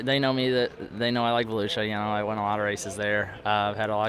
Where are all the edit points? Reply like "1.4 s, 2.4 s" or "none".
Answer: none